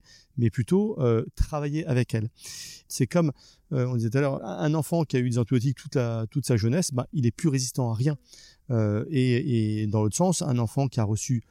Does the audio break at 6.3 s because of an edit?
no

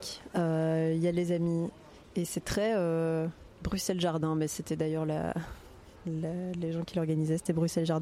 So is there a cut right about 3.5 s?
yes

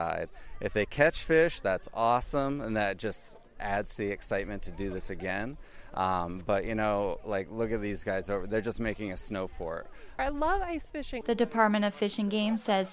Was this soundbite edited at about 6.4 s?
no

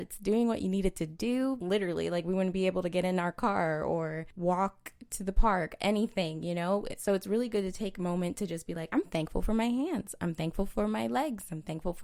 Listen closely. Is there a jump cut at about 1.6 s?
yes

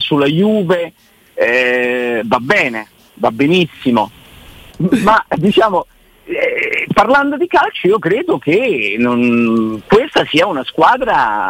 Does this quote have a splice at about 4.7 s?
yes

